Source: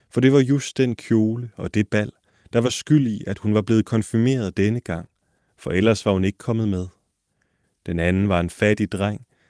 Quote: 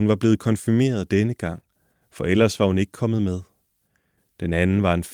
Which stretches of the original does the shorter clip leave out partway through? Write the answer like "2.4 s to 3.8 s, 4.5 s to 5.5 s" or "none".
none